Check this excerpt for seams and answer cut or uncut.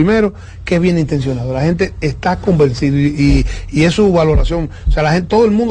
uncut